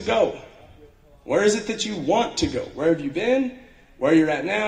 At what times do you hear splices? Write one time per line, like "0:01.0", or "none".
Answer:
none